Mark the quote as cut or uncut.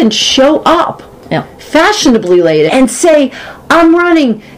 cut